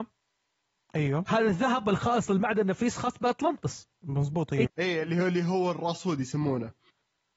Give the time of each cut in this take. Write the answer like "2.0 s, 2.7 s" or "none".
4.7 s